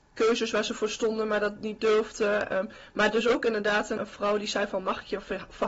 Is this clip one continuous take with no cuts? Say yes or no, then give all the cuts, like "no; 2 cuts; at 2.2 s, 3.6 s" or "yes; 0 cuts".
no; 1 cut; at 4.0 s